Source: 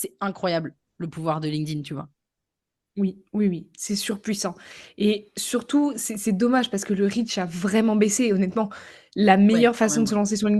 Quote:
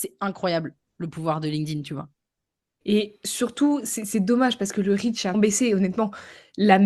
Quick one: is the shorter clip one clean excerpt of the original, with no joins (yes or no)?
no